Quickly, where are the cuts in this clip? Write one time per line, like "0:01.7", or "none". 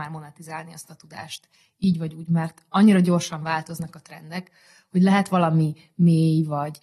none